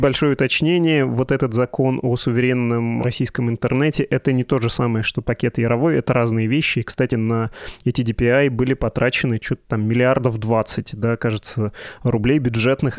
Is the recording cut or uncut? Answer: uncut